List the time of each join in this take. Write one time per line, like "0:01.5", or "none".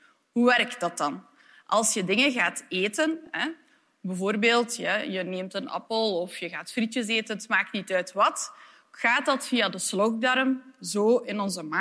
none